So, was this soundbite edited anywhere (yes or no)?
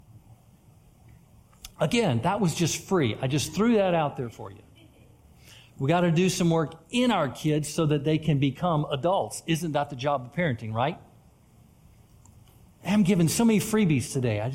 no